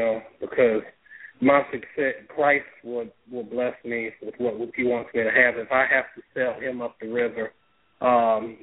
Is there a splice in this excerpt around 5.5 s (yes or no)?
no